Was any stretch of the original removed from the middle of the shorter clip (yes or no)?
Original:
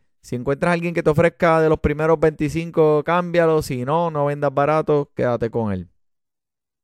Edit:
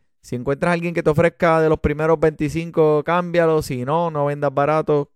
no